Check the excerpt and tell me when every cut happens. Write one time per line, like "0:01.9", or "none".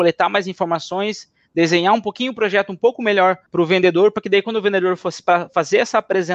0:03.5